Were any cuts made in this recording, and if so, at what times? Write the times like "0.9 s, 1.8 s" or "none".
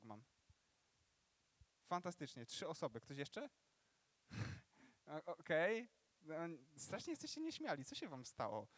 1.7 s